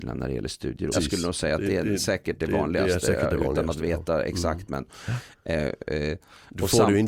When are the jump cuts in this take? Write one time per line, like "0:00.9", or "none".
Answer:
0:00.9

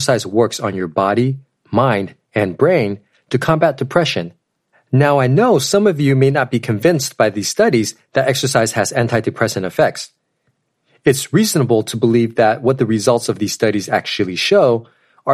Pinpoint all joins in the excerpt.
0:04.7

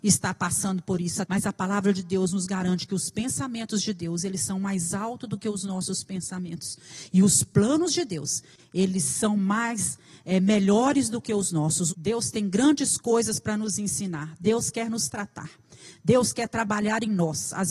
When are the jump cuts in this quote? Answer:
0:01.2
0:11.9

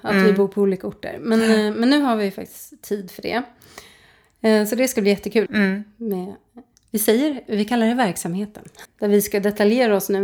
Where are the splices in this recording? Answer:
0:05.5
0:08.9

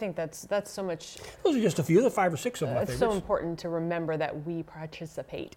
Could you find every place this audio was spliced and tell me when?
none

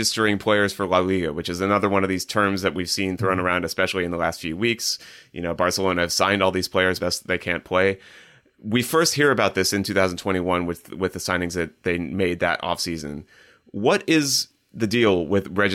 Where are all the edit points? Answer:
0:07.0

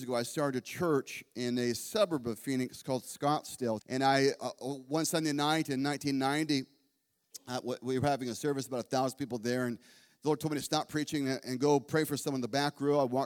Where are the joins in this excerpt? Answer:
0:03.8

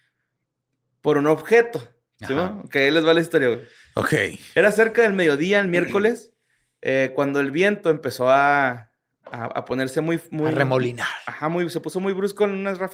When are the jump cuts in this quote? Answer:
none

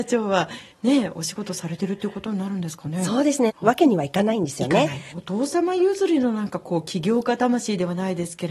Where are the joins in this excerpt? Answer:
0:03.5
0:05.1

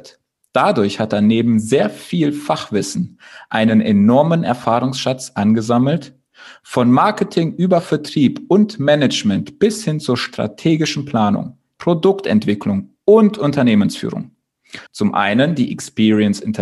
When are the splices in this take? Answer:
0:11.7
0:14.9

